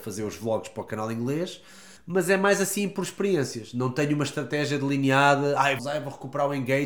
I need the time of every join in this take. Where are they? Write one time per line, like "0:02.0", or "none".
0:02.0
0:05.8